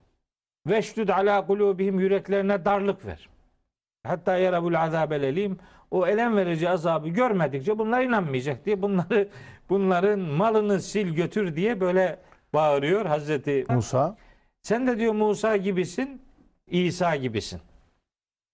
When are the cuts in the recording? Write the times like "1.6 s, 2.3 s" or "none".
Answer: 4.0 s, 13.7 s, 16.7 s

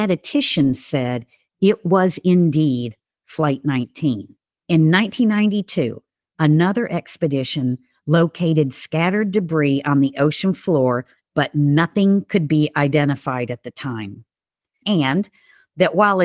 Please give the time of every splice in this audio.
4.6 s, 14.8 s

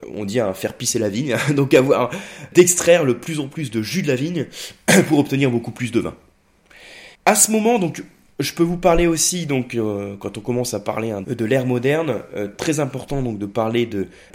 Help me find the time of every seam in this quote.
11.2 s

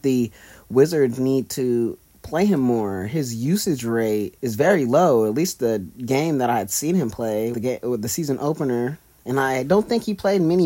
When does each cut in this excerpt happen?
4.4 s, 7.5 s

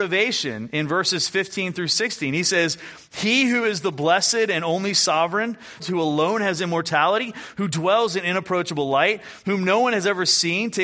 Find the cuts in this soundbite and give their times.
5.8 s

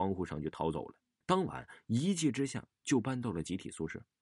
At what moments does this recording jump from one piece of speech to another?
1.2 s

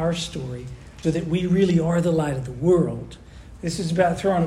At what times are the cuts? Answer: 1.0 s, 3.6 s

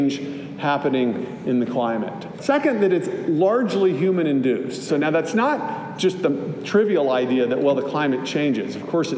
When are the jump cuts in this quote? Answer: 2.3 s, 4.9 s

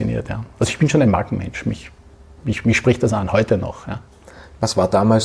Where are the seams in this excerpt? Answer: none

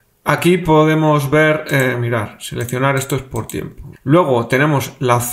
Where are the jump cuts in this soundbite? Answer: 3.9 s

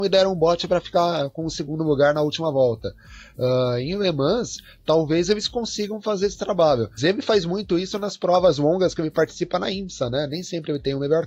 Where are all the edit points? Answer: 7.0 s

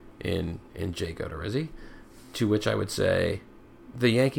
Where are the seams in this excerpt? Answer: none

